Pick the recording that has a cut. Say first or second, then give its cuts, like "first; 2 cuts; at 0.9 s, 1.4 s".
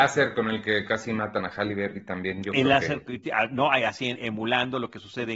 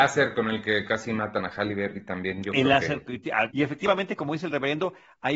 second; 1 cut; at 3.5 s